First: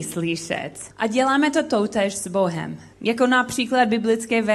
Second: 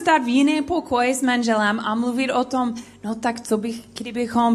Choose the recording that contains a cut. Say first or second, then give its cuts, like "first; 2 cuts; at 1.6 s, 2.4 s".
first; 2 cuts; at 0.9 s, 2.9 s